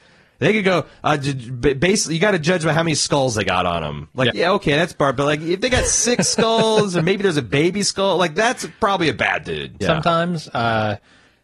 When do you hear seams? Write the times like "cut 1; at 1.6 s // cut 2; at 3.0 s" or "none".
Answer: cut 1; at 4.3 s // cut 2; at 9.8 s